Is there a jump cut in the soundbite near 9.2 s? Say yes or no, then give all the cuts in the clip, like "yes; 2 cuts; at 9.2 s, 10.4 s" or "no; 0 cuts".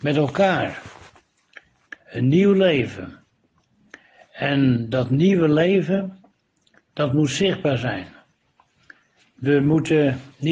no; 1 cut; at 1.9 s